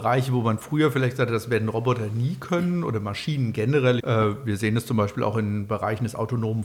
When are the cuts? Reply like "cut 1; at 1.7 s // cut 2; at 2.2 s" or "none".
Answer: cut 1; at 4.0 s